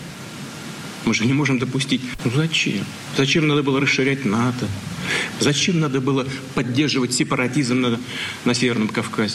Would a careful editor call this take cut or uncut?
cut